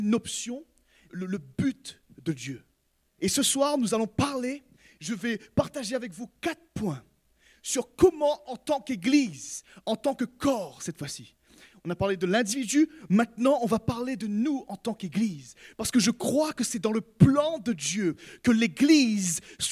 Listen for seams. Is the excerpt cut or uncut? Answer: cut